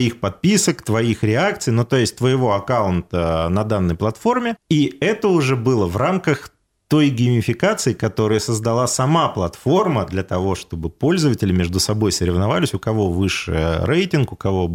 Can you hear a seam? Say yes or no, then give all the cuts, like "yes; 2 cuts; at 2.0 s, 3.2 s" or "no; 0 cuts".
no; 0 cuts